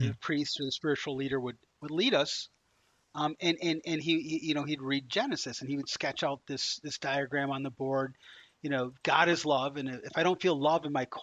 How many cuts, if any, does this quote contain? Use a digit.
0